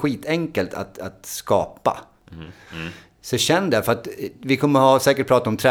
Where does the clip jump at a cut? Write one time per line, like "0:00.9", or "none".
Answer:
0:02.7